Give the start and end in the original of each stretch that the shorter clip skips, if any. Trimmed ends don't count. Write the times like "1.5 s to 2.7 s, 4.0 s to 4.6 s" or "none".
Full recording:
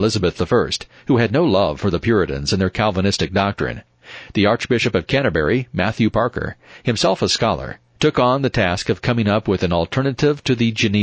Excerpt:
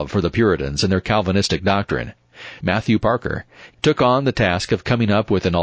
4.3 s to 5.7 s, 6.8 s to 7.9 s

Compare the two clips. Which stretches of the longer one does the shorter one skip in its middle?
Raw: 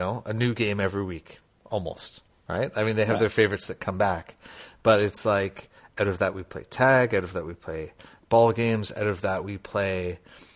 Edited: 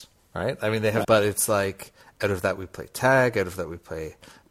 3.2 s to 4.8 s

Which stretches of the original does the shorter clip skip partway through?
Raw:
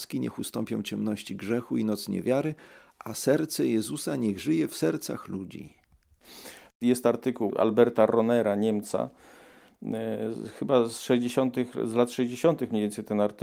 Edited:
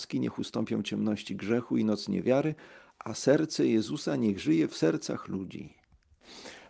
none

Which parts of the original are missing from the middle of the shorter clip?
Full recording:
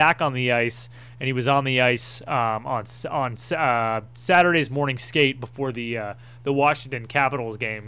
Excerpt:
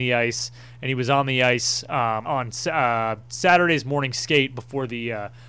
2.6 s to 3.1 s

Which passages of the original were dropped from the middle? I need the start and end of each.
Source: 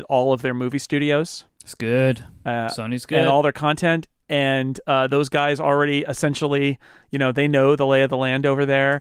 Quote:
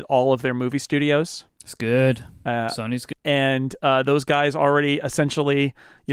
3.1 s to 4.2 s

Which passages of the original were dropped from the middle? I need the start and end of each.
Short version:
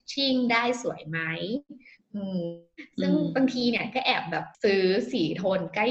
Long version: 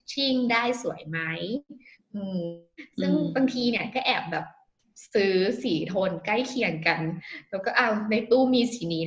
4.5 s to 5.1 s

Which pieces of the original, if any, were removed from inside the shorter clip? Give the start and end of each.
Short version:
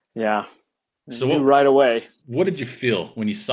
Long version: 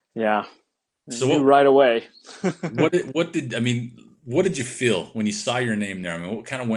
2.2 s to 4.2 s

